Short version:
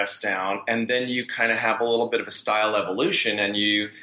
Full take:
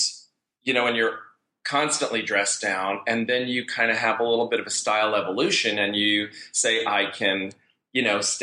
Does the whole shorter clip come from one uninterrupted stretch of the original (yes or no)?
yes